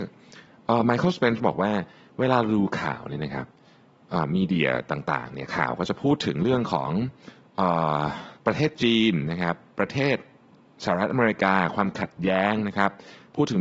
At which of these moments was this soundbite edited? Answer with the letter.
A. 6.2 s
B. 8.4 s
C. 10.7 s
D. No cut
B